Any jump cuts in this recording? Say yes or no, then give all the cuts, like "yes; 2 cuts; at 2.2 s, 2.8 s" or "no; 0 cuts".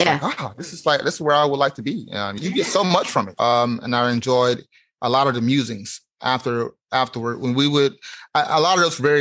yes; 1 cut; at 3.4 s